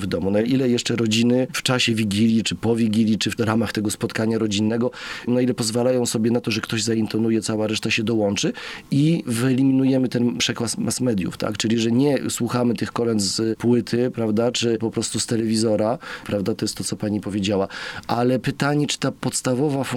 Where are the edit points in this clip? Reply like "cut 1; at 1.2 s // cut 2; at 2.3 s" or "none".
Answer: cut 1; at 5.3 s // cut 2; at 14.5 s // cut 3; at 16.2 s